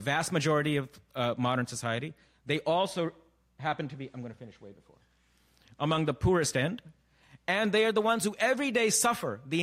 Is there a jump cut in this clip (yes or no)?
no